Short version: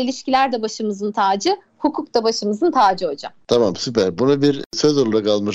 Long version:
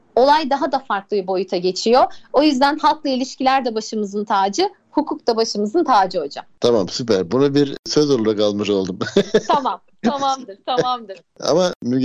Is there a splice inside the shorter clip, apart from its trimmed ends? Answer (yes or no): no